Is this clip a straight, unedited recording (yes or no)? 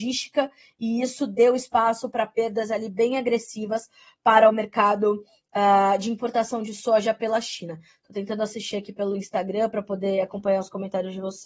yes